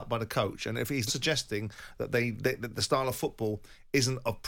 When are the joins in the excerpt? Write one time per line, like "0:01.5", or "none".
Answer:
0:01.1